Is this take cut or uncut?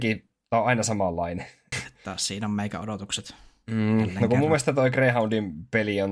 cut